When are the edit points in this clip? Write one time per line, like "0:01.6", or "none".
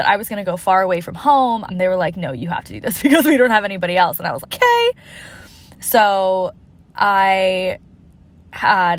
0:01.7
0:04.4